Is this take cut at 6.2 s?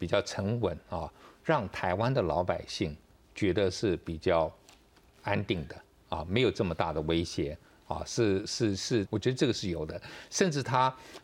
no; 1 cut; at 9.0 s

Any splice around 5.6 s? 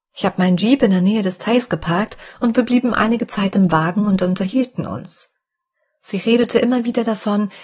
no; 0 cuts

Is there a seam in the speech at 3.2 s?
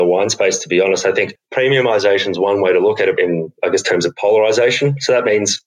yes; 1 cut; at 3.2 s

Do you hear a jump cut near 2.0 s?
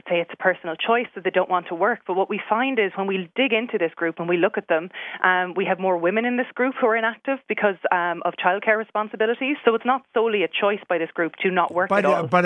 no; 2 cuts; at 9.6 s, 11.4 s

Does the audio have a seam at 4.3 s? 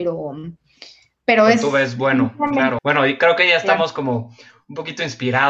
no; 1 cut; at 2.8 s

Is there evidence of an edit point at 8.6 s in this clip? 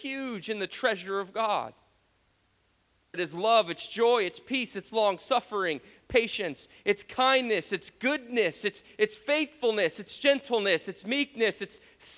no; 1 cut; at 3.1 s

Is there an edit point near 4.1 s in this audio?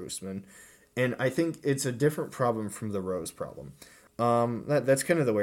yes; 1 cut; at 4.1 s

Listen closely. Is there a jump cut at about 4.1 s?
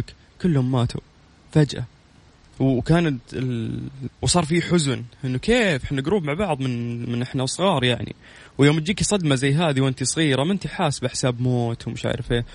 yes; 1 cut; at 4.1 s

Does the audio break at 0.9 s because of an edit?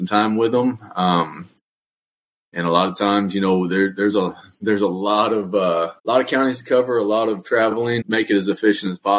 no; 2 cuts; at 6.0 s, 8.0 s

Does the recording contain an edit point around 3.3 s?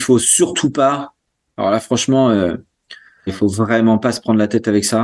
yes; 1 cut; at 3.3 s

